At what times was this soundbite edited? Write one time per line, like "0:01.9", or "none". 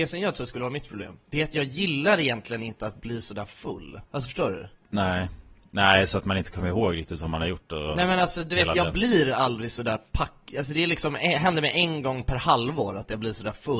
0:04.0